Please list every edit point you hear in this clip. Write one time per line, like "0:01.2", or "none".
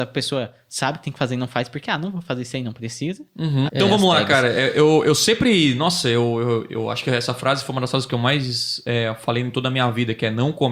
0:03.7